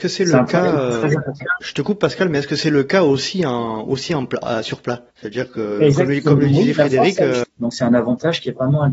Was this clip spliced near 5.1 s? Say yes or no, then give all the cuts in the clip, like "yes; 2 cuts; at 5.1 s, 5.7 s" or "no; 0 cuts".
yes; 2 cuts; at 5.1 s, 7.4 s